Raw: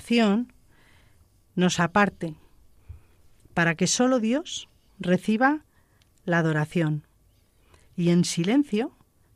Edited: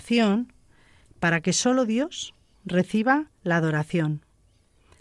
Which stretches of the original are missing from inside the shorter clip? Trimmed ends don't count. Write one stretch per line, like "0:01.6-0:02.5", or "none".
0:01.0-0:03.4
0:05.7-0:06.2